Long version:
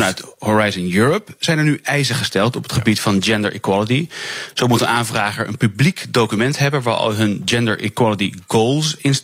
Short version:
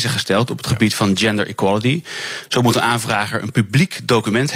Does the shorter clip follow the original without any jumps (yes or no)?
yes